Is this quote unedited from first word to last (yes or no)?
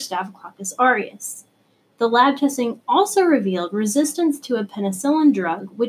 yes